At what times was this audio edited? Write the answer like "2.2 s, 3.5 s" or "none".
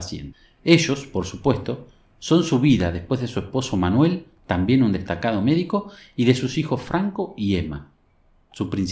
none